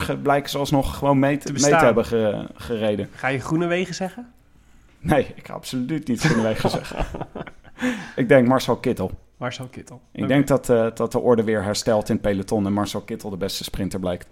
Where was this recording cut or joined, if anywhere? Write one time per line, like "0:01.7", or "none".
0:00.9